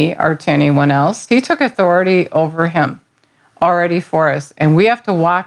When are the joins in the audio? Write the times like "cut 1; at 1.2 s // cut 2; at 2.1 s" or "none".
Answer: cut 1; at 1.3 s